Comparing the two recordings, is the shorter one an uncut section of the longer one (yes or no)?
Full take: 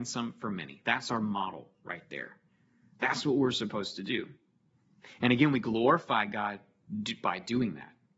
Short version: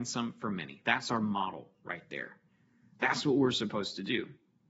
yes